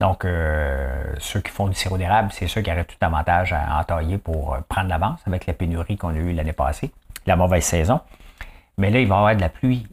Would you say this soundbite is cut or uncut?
uncut